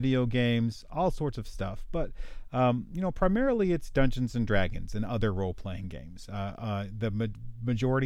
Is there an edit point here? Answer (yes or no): no